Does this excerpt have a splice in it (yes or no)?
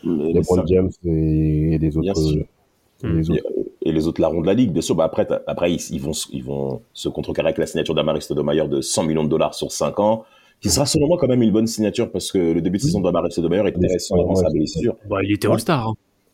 yes